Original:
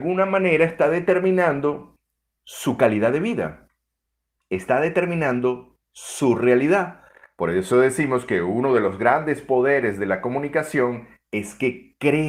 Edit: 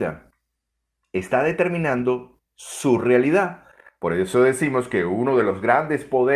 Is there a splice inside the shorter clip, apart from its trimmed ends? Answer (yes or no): no